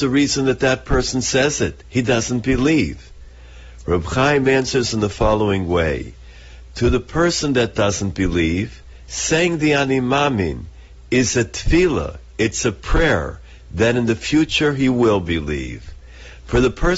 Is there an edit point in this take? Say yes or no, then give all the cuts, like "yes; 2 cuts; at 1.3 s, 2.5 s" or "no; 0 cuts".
no; 0 cuts